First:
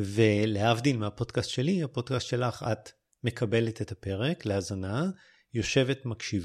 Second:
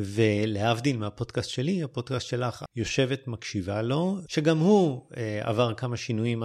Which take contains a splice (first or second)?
second